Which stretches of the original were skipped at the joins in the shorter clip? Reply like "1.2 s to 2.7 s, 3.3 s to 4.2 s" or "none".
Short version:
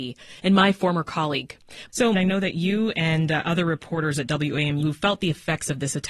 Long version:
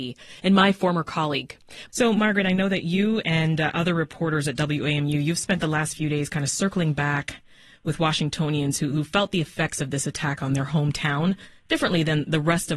2.1 s to 2.4 s, 5.1 s to 8.9 s